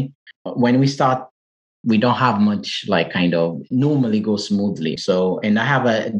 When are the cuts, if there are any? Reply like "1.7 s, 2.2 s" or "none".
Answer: 1.7 s, 5.0 s